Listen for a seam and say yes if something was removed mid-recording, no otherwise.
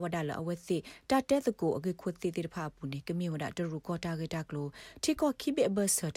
no